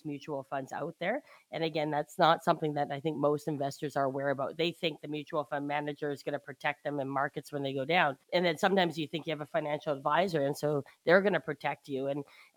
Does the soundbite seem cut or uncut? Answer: cut